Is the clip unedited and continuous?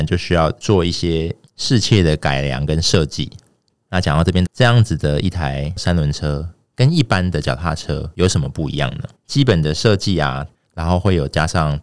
no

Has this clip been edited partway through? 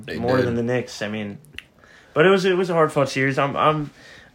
no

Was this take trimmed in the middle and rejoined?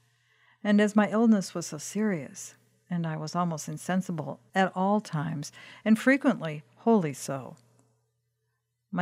no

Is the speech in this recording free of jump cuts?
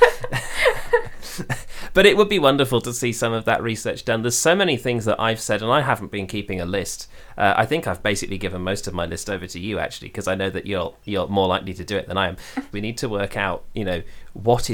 no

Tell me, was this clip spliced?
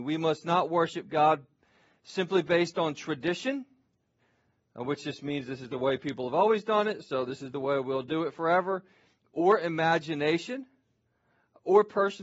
no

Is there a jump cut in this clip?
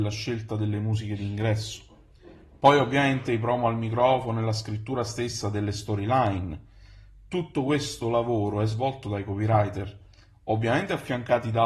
no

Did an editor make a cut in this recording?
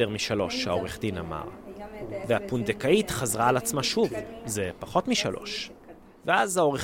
yes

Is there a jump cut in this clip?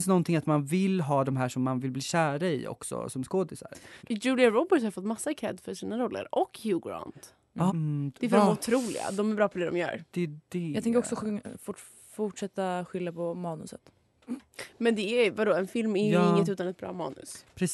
yes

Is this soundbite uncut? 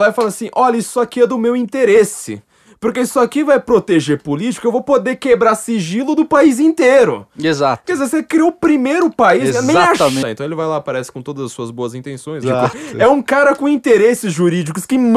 no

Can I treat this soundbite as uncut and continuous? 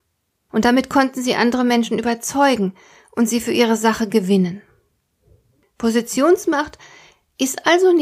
yes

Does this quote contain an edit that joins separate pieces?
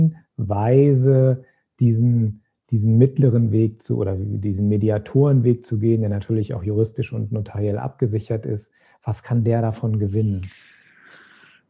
no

